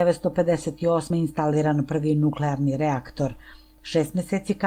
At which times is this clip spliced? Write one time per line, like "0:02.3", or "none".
none